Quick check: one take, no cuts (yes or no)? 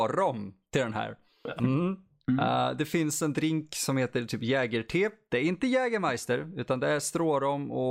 no